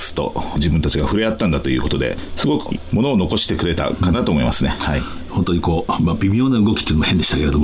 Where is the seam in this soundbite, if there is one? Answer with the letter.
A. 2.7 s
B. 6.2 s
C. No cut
A